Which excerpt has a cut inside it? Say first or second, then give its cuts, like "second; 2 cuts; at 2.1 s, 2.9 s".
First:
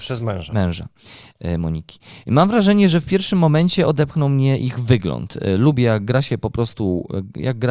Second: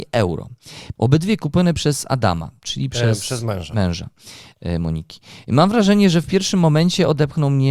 second; 1 cut; at 1.0 s